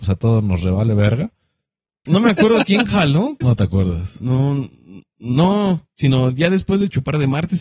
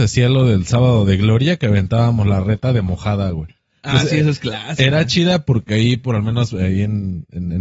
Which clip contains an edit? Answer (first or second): first